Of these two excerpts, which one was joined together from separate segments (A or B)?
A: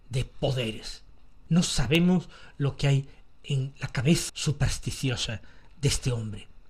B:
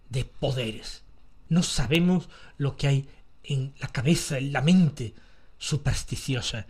A